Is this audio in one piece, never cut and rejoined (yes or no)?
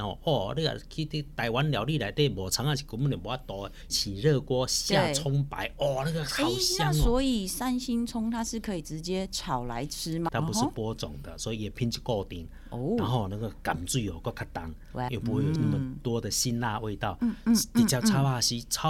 no